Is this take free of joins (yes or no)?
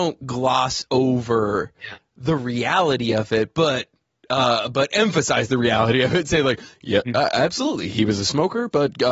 yes